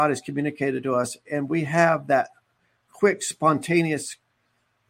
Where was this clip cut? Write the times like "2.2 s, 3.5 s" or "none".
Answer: none